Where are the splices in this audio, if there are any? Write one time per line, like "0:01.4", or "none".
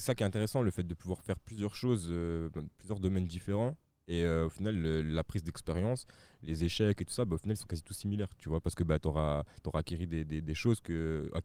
0:08.4